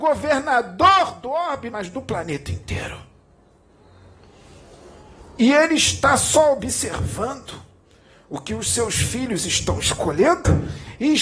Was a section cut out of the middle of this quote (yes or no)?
yes